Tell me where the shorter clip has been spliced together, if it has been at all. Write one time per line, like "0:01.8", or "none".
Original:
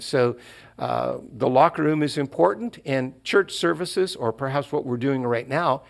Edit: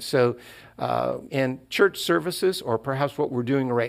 0:01.3